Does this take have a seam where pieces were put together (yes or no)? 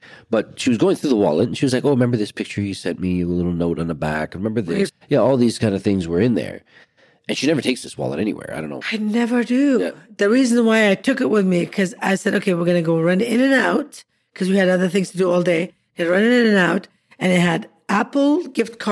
yes